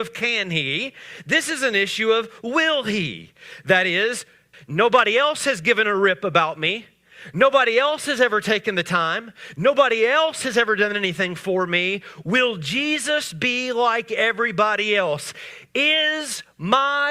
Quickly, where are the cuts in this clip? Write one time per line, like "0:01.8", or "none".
0:04.5